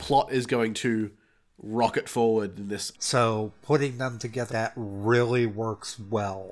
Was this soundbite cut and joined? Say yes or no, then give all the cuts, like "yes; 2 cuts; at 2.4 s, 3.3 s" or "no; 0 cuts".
yes; 2 cuts; at 2.9 s, 4.5 s